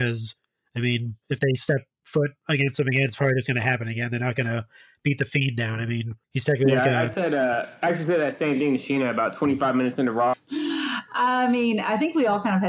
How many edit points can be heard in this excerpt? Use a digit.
2